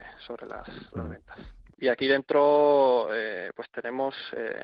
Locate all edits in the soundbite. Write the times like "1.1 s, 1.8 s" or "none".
1.7 s